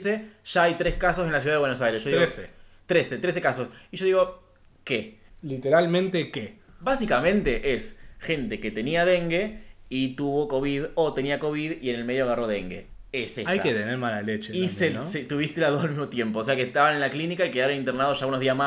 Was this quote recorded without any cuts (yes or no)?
yes